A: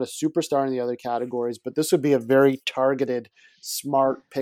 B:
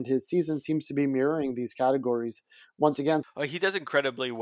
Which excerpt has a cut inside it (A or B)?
B